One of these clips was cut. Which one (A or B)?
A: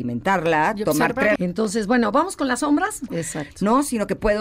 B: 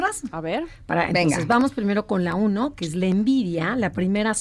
A